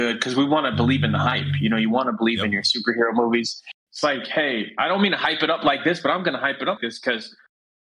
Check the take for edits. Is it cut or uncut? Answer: cut